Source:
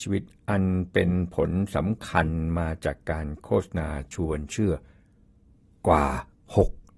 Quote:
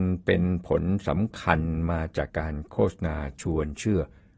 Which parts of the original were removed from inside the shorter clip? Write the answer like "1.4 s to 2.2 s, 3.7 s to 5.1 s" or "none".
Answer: 3.0 s to 3.0 s